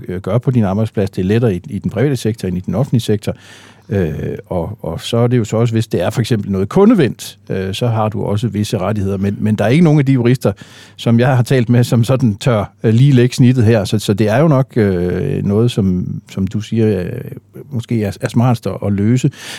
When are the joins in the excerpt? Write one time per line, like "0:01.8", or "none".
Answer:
none